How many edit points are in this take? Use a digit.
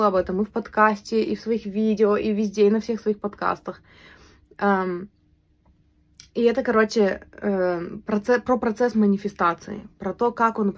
0